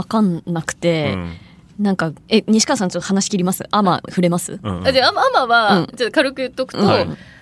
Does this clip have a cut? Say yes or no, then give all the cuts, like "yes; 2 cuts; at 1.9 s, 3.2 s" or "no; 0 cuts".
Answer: yes; 1 cut; at 2.2 s